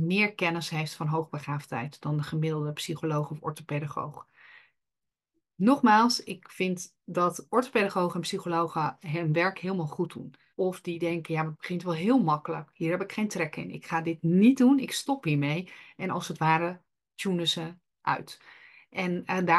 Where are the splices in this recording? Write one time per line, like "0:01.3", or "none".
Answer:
0:10.5